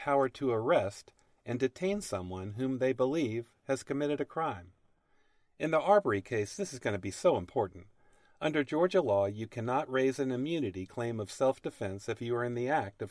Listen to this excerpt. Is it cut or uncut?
uncut